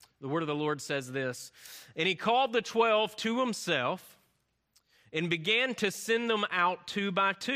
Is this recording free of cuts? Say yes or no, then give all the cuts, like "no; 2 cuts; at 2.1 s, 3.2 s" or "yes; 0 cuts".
yes; 0 cuts